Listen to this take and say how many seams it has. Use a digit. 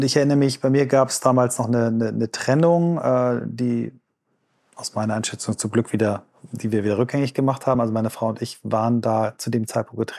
0